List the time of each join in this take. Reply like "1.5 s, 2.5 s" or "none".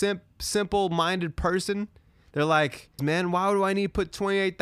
3.0 s